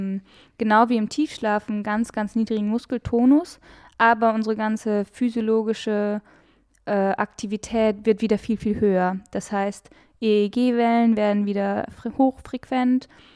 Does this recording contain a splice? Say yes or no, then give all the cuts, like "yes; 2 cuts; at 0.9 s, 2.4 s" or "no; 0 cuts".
no; 0 cuts